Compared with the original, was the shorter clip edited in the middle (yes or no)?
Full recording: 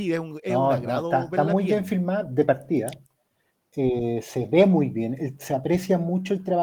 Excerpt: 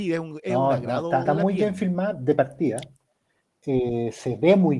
yes